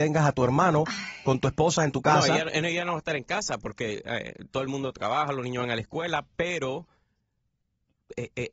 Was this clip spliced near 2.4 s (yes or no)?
no